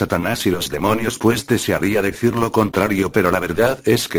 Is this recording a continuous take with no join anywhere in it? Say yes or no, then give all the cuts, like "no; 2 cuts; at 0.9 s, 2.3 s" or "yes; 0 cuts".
yes; 0 cuts